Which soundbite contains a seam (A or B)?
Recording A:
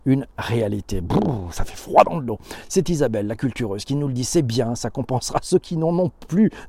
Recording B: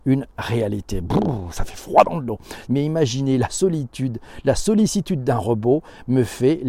B